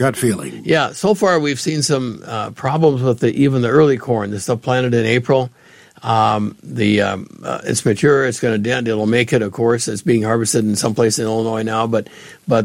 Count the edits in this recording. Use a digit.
0